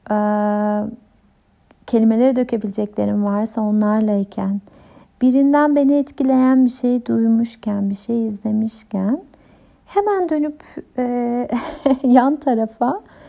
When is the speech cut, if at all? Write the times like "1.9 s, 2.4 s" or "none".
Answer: none

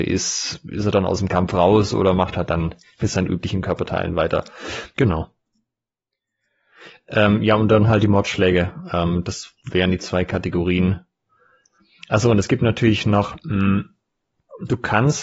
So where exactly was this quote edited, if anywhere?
4.9 s

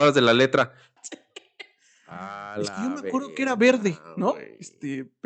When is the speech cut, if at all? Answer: 1.0 s

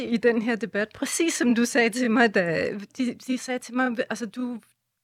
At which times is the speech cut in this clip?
2.9 s

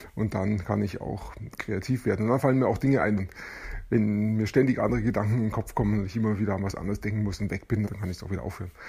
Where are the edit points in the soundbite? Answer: 3.2 s, 7.9 s

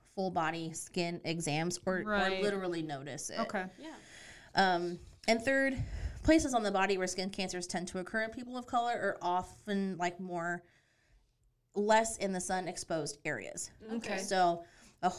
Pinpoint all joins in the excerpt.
none

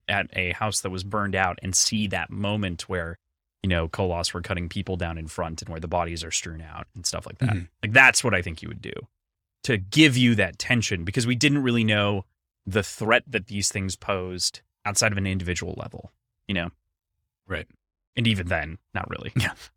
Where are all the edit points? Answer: 18.9 s

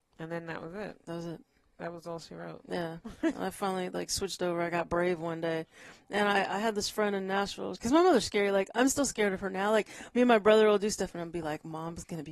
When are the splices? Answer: 7.7 s

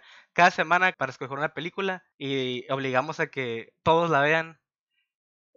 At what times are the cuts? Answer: 0.9 s, 2.1 s

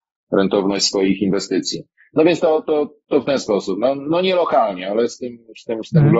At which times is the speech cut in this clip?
none

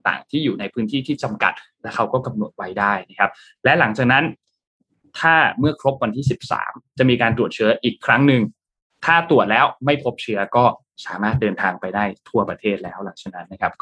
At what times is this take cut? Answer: none

